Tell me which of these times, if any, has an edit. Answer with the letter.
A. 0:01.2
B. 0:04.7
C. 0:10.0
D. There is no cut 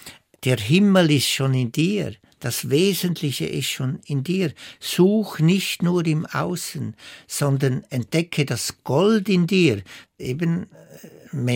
C